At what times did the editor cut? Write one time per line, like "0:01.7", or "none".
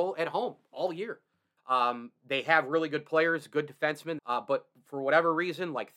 0:01.6
0:04.2

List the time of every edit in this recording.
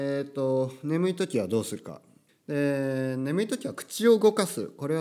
0:02.3

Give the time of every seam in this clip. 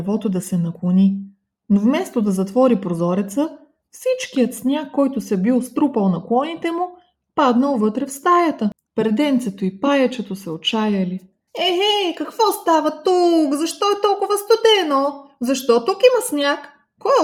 0:08.9
0:11.5

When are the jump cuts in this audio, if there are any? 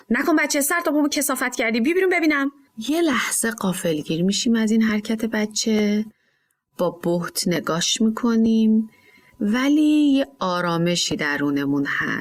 0:02.7

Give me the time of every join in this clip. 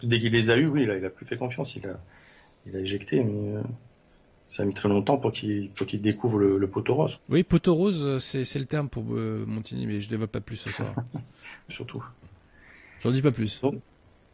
0:07.2
0:11.7

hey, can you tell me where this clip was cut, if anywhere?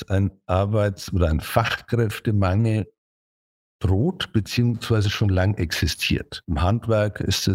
none

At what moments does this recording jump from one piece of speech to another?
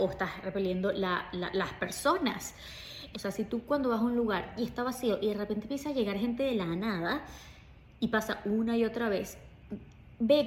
0:03.1

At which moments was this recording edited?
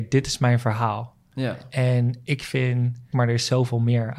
0:03.1

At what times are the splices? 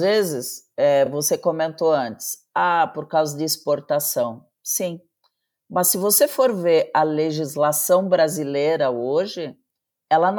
none

